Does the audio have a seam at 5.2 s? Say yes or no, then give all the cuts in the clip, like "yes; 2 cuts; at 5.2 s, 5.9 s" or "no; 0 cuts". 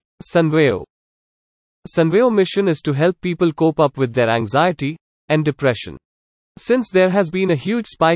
yes; 1 cut; at 5.2 s